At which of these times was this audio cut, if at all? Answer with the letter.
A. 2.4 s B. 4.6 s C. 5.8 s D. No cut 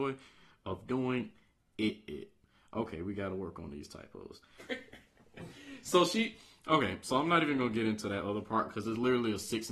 B